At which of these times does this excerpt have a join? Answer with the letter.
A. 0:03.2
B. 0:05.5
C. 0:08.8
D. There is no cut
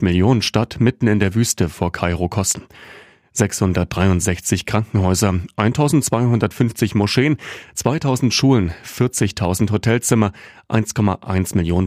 D